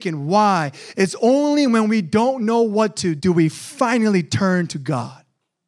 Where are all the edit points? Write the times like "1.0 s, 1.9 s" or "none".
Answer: 3.2 s